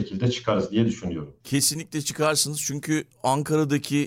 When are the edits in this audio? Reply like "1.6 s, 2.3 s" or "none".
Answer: none